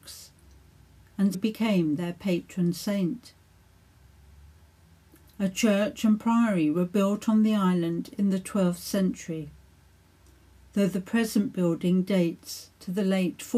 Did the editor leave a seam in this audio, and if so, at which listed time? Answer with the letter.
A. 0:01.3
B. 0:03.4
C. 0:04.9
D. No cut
A